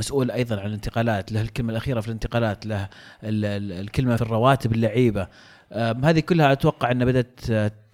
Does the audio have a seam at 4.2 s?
yes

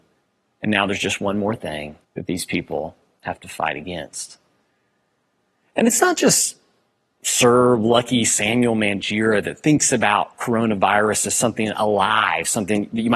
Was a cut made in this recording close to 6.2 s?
no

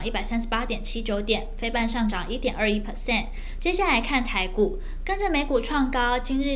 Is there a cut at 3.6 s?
yes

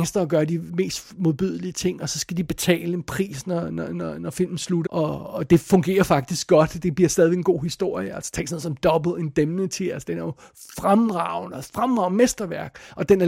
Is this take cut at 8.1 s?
no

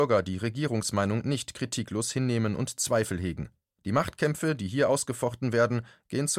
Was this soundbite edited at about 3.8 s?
yes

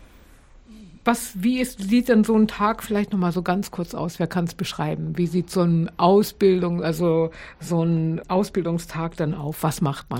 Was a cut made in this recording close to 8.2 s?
yes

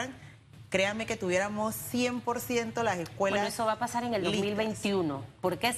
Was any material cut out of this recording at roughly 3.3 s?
no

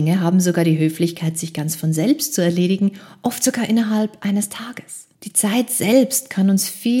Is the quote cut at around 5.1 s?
yes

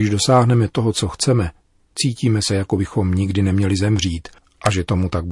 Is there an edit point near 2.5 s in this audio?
no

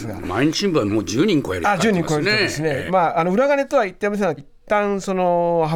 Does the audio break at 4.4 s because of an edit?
yes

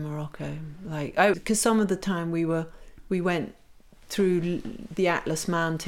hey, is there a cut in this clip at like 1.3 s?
yes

